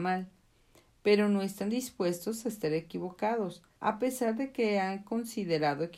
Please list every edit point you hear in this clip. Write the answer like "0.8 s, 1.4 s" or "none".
3.7 s